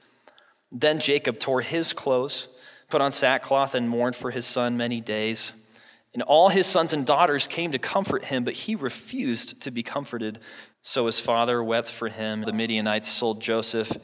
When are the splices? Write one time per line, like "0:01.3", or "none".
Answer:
0:10.7
0:12.4

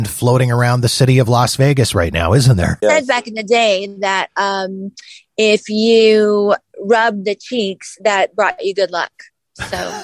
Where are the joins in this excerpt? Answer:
0:02.8

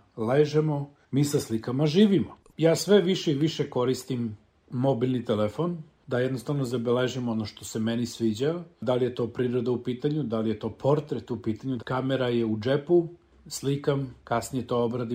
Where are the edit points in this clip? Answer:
0:02.5
0:11.8

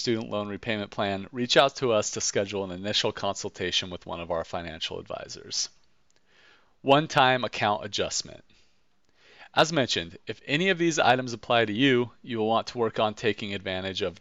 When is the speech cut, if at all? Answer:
none

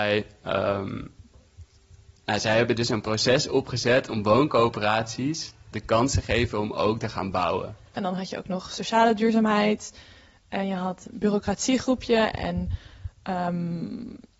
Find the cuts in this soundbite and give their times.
0:05.7
0:08.0
0:11.1

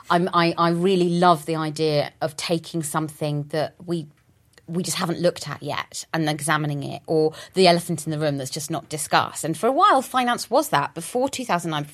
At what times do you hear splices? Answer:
none

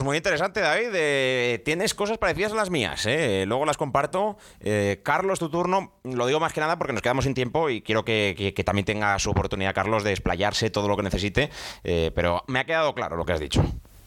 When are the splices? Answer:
none

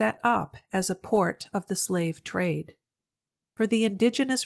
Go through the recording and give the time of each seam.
0:03.4

